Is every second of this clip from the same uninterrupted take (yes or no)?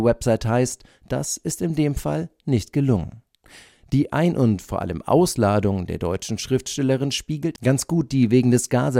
yes